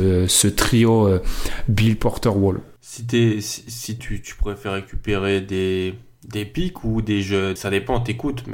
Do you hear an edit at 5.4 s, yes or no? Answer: no